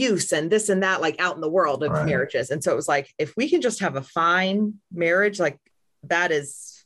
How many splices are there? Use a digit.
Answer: 0